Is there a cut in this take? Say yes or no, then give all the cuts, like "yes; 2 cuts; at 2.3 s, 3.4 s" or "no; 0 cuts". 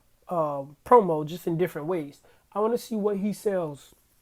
yes; 1 cut; at 2.3 s